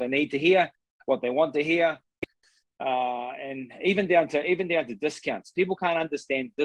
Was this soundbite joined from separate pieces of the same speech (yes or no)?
no